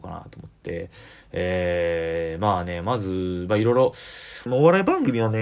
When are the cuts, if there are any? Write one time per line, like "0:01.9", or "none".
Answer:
0:04.5